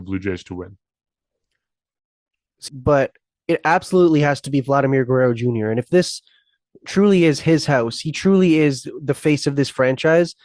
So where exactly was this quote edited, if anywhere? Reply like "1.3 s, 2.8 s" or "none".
2.7 s